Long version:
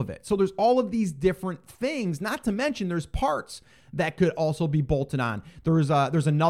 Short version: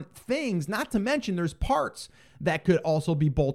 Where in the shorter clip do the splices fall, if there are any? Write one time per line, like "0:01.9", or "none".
none